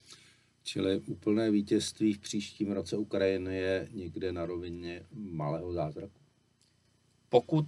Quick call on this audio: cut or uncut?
uncut